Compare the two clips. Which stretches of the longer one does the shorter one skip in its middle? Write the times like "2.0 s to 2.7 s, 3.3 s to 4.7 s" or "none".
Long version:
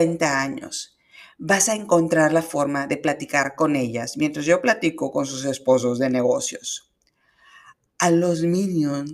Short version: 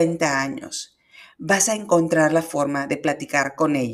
none